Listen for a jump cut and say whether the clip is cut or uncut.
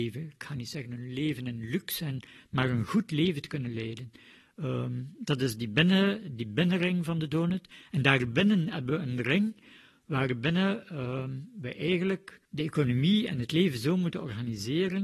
cut